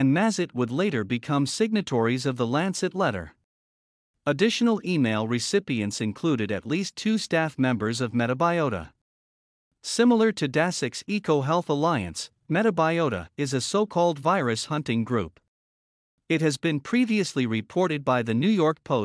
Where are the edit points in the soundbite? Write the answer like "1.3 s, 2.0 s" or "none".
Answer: none